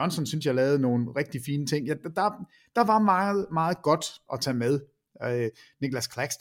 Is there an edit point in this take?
no; 0 cuts

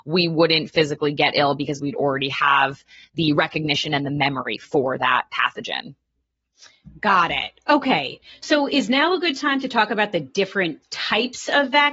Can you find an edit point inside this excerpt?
no; 0 cuts

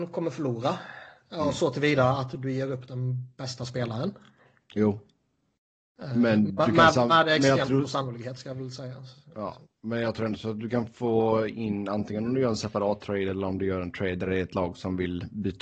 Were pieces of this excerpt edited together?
no; 0 cuts

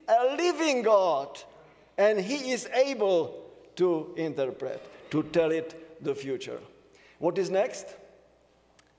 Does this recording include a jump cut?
no; 0 cuts

